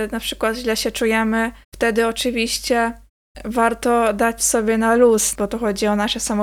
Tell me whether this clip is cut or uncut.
cut